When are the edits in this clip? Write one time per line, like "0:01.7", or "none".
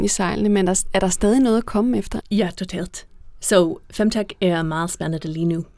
0:02.2